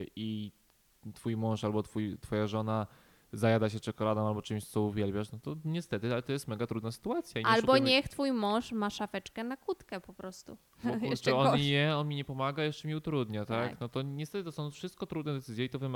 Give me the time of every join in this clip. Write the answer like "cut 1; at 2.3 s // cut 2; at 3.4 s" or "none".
cut 1; at 10.8 s